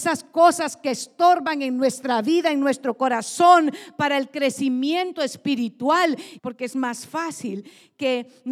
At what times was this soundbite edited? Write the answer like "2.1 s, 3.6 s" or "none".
6.4 s